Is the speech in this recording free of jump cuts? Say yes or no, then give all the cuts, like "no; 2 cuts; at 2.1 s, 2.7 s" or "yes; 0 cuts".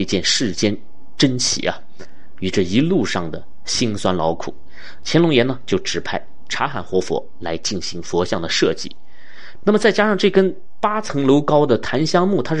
no; 1 cut; at 9.6 s